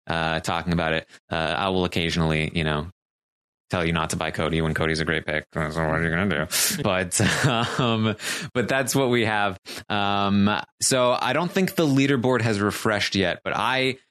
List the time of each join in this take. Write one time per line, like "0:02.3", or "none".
0:06.8